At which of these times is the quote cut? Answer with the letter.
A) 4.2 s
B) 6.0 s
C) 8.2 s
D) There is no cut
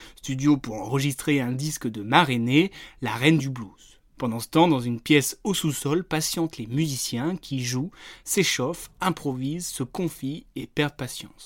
A